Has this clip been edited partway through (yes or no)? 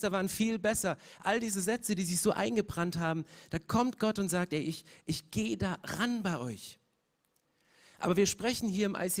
no